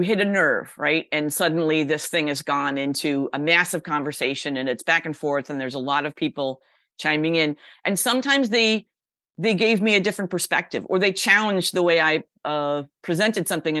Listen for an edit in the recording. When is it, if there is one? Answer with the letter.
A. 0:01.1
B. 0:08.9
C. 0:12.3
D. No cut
D